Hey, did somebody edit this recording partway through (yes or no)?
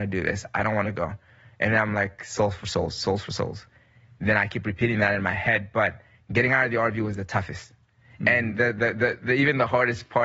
no